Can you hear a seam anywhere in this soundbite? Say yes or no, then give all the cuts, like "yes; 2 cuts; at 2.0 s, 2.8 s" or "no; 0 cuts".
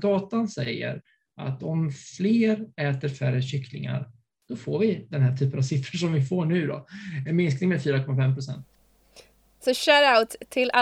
no; 0 cuts